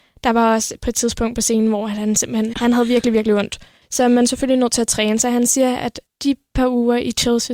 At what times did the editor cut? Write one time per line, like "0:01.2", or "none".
0:02.5